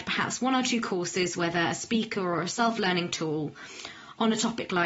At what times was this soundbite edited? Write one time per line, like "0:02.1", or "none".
none